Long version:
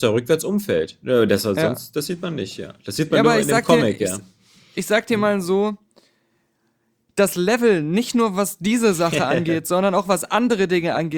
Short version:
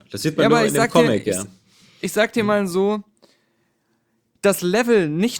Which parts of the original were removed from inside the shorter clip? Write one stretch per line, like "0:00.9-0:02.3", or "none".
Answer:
none